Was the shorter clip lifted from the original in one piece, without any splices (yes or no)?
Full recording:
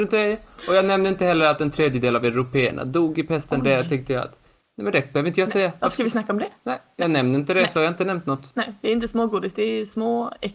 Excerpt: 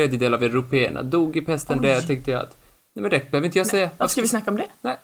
yes